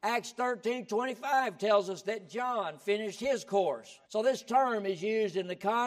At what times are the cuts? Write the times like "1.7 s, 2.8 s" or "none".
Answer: 4.0 s